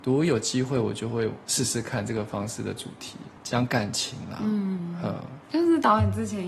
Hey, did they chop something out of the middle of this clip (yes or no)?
yes